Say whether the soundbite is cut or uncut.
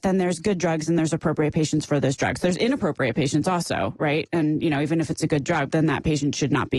cut